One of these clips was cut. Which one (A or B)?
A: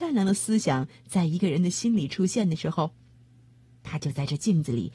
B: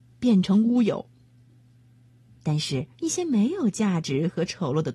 B